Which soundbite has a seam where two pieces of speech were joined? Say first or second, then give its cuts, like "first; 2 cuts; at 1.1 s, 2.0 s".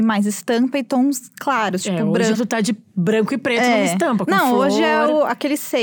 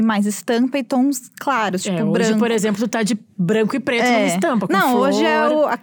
first; 1 cut; at 2.3 s